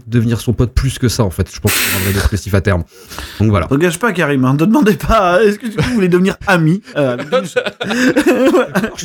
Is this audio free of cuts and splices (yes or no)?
yes